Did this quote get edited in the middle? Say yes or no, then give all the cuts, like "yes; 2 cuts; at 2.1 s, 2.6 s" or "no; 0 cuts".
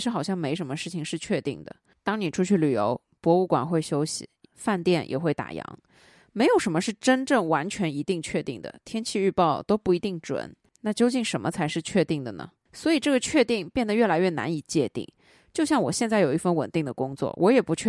yes; 1 cut; at 4.4 s